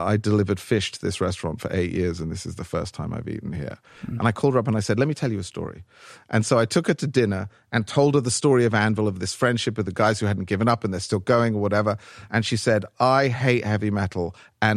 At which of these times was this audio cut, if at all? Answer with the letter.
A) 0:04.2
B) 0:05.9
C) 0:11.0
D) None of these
A